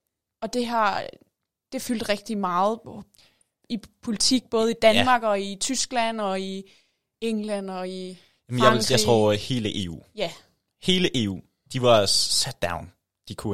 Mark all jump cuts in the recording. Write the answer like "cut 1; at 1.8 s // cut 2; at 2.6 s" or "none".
none

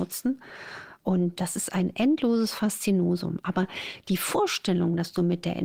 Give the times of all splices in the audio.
cut 1; at 1.4 s

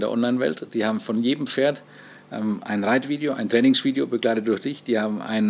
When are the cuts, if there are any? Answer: none

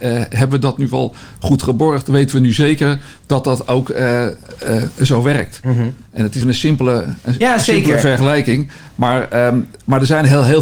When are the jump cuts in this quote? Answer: cut 1; at 6.4 s

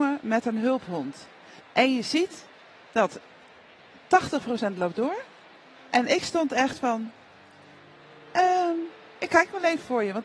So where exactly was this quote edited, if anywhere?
cut 1; at 1.6 s

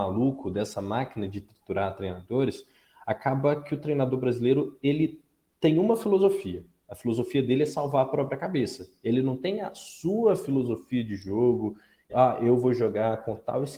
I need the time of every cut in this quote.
cut 1; at 12.1 s

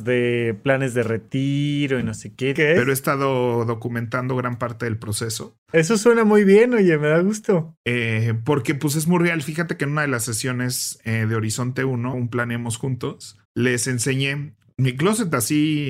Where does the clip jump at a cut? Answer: cut 1; at 2.6 s // cut 2; at 12.1 s // cut 3; at 13.5 s

